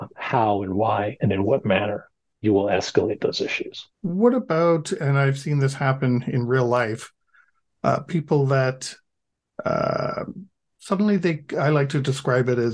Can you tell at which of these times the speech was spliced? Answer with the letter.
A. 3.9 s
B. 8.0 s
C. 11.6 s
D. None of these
A